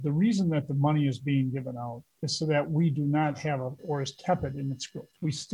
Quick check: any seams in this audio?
yes; 1 cut; at 3.8 s

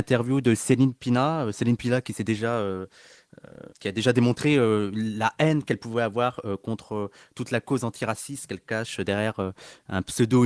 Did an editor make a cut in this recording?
yes; 1 cut; at 3.7 s

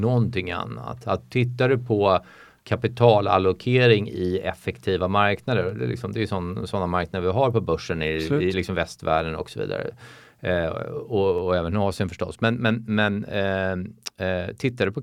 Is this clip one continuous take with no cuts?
yes; 0 cuts

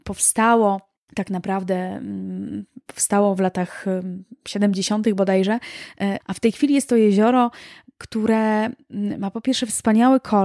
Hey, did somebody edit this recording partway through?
yes; 1 cut; at 6.2 s

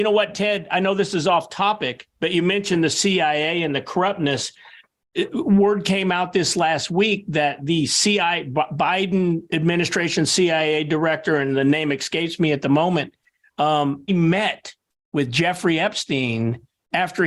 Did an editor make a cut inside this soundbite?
yes; 1 cut; at 14.1 s

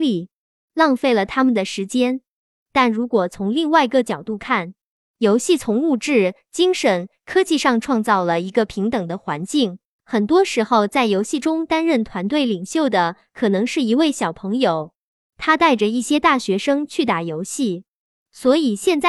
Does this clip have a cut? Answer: yes; 1 cut; at 9.9 s

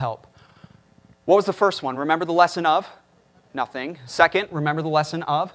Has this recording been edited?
no; 0 cuts

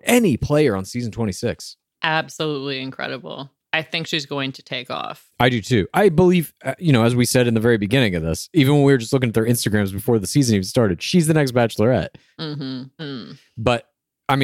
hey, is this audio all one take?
no; 1 cut; at 13.0 s

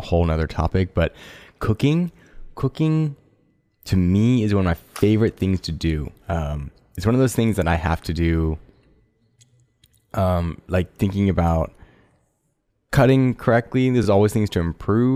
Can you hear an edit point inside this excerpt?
no; 0 cuts

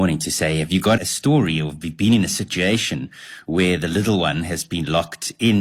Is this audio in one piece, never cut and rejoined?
no; 1 cut; at 1.0 s

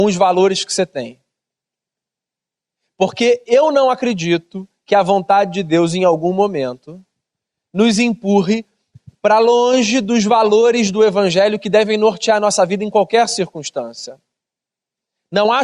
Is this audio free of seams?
yes; 0 cuts

